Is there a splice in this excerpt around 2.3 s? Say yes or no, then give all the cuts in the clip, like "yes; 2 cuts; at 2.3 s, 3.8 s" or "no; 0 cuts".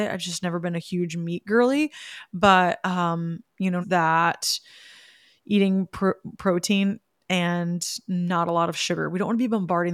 no; 1 cut; at 3.8 s